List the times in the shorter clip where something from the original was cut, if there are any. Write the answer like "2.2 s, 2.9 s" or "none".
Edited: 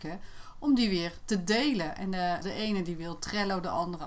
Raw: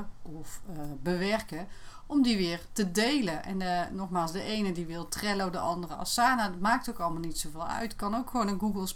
2.4 s

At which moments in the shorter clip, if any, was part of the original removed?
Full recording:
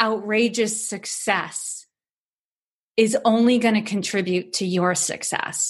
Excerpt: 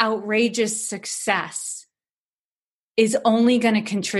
none

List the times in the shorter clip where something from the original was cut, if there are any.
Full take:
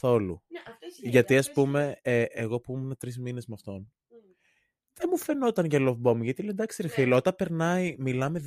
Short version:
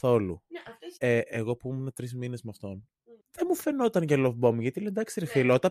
1.0 s, 3.2 s

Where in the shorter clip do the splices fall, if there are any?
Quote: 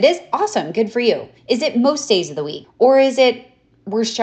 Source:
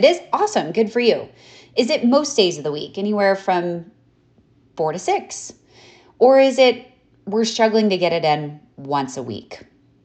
1.4 s, 2.6 s

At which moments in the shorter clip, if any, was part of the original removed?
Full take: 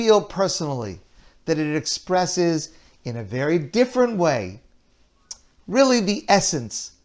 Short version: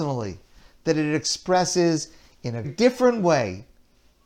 2.6 s

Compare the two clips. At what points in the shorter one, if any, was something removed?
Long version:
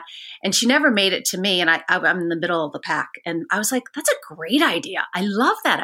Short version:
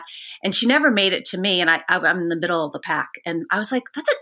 none

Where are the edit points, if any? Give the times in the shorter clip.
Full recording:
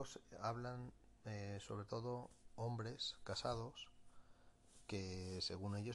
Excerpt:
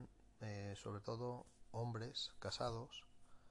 none

